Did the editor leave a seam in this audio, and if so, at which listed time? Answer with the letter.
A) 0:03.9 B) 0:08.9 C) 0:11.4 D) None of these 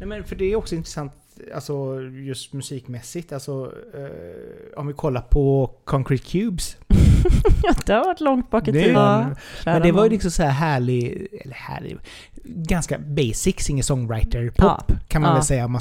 B